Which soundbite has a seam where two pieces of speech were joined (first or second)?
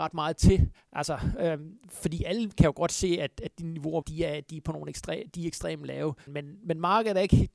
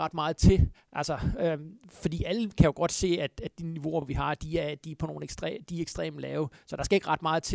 first